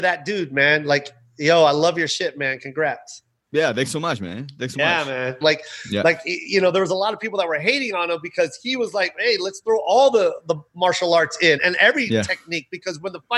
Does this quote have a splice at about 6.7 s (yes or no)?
no